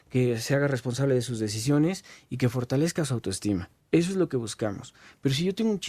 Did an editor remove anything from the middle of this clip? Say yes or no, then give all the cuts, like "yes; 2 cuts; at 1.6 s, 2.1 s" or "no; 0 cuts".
no; 0 cuts